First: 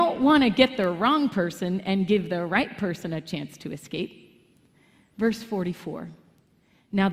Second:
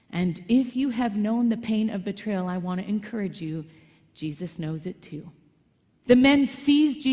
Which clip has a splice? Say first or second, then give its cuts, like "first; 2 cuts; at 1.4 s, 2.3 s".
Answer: second; 1 cut; at 6.0 s